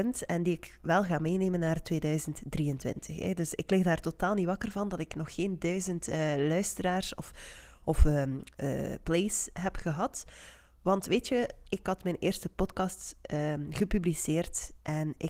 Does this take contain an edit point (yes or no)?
no